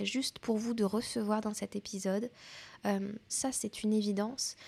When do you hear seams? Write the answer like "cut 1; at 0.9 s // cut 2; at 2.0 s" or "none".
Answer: cut 1; at 3.3 s

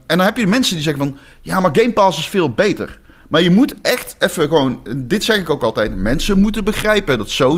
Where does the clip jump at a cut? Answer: none

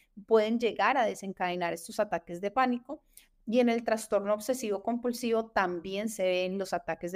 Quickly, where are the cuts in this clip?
none

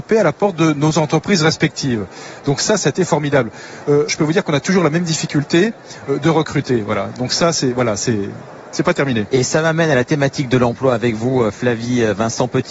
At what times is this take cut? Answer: cut 1; at 4.1 s

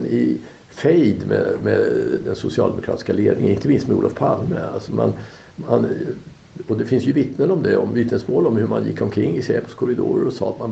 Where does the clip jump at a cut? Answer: none

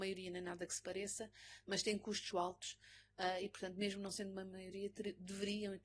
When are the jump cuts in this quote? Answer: cut 1; at 2.3 s

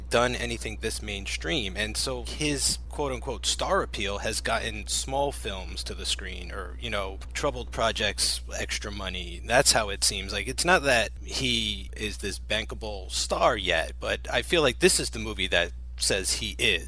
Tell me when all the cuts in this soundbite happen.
cut 1; at 2.2 s

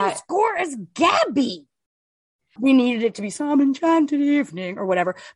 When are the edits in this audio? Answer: cut 1; at 2.6 s

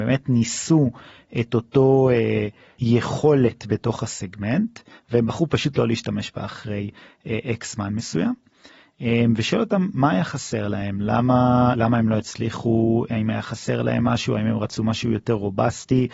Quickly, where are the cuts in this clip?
none

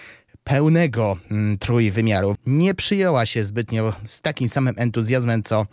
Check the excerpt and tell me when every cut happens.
cut 1; at 2.4 s

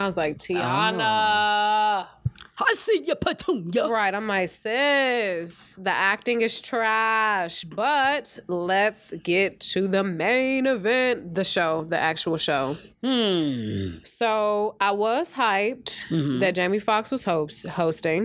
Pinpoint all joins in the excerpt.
none

